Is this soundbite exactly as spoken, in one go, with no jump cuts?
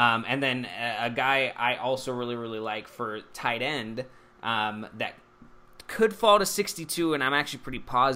yes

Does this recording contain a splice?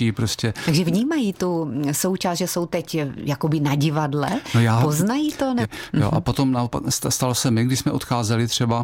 yes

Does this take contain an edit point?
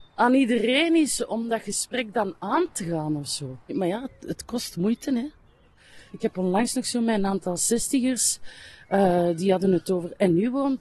no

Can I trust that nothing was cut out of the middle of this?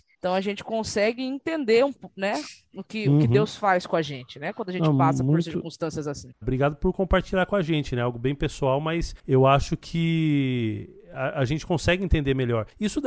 no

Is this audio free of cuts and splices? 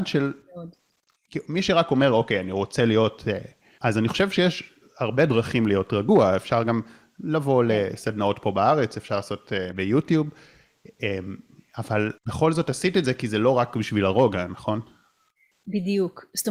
no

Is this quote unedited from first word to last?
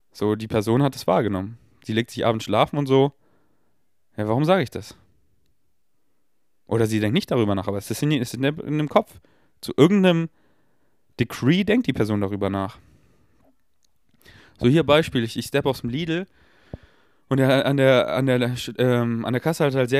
yes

